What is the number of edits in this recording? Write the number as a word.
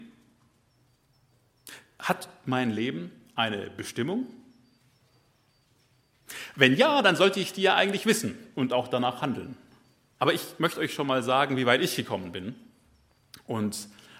one